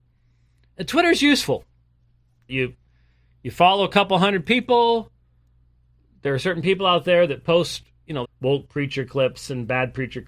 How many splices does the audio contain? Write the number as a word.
two